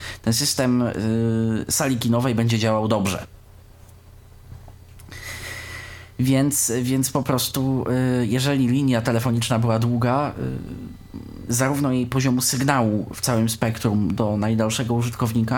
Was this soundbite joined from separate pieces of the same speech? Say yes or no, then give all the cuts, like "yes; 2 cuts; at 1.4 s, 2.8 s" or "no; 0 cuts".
yes; 2 cuts; at 6.1 s, 11.5 s